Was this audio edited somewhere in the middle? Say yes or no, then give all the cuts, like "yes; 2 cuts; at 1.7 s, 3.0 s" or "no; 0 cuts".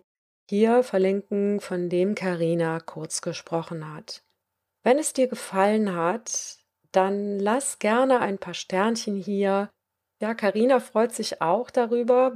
no; 0 cuts